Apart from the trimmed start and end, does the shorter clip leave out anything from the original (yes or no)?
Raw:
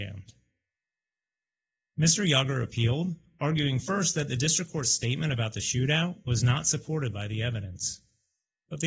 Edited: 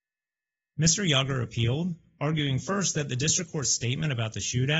no